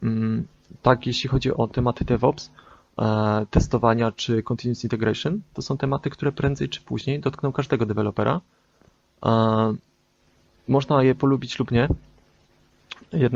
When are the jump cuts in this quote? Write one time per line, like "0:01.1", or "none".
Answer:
0:01.5